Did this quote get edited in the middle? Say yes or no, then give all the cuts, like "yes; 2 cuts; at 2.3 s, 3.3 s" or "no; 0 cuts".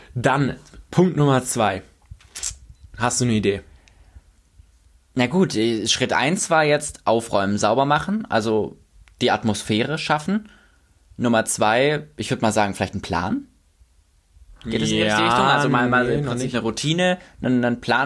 no; 0 cuts